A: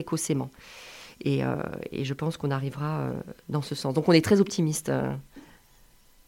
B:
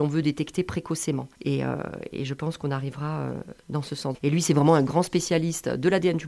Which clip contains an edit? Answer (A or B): B